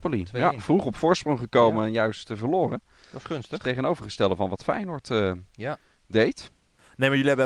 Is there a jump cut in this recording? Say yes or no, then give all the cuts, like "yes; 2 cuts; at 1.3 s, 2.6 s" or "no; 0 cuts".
no; 0 cuts